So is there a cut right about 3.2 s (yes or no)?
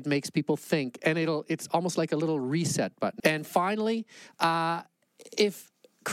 yes